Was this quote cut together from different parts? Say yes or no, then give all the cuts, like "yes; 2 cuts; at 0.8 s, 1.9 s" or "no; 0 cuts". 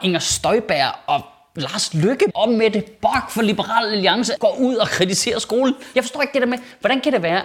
yes; 3 cuts; at 2.3 s, 4.4 s, 5.9 s